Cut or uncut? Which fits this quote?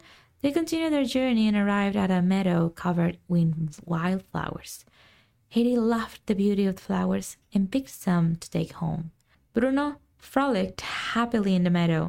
uncut